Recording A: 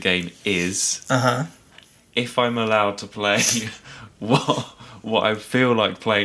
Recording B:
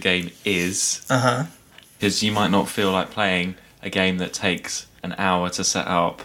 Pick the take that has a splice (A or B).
B